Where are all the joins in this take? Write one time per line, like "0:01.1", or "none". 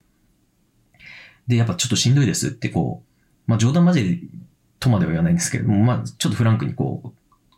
0:03.3

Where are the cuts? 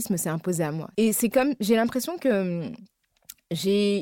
0:00.9

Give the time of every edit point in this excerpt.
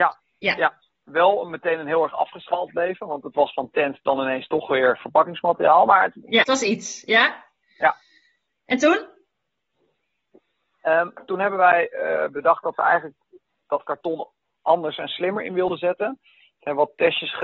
0:06.4

